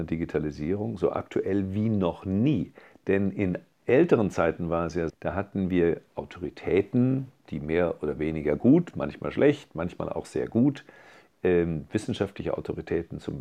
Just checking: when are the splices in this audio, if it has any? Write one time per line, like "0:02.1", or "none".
0:05.1